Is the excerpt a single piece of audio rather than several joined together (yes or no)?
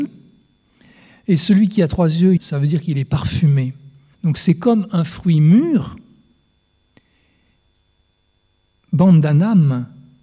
no